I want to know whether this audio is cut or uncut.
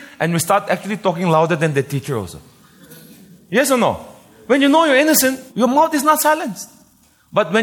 cut